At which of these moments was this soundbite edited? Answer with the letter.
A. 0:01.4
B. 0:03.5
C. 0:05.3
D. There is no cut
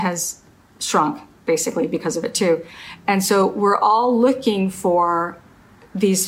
D